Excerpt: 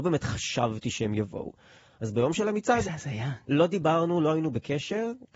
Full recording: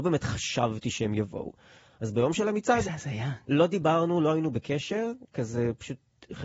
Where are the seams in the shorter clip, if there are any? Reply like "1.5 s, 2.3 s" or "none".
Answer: none